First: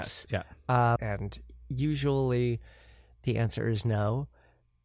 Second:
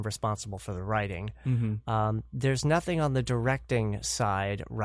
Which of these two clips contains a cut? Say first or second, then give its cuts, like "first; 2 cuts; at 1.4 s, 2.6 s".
first; 1 cut; at 1.0 s